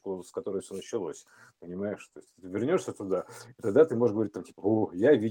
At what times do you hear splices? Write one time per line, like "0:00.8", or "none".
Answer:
none